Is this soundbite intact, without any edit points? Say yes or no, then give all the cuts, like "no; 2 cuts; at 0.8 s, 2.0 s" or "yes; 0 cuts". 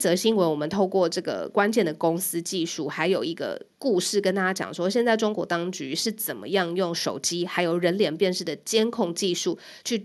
yes; 0 cuts